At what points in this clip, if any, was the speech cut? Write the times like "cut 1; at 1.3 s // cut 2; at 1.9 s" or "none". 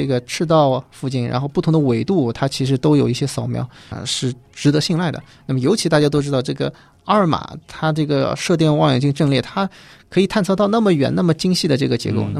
cut 1; at 3.9 s